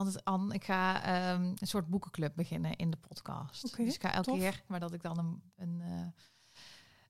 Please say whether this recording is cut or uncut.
cut